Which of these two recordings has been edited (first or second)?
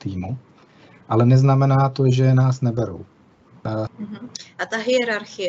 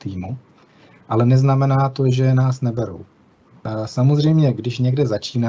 first